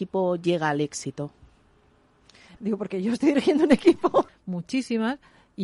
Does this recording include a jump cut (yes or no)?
yes